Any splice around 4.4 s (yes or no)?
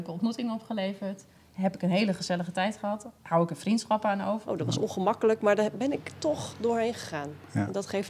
yes